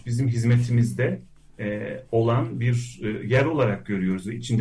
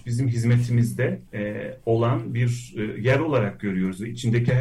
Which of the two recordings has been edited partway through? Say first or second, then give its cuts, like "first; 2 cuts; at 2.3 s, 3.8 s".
second; 1 cut; at 1.3 s